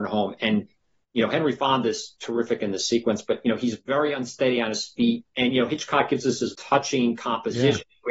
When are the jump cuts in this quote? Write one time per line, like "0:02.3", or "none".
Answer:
0:05.2
0:06.5